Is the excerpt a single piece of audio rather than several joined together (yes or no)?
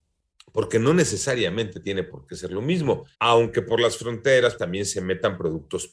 no